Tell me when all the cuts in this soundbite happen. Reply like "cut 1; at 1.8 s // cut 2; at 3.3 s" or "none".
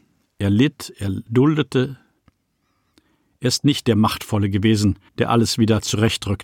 cut 1; at 1.3 s // cut 2; at 5.1 s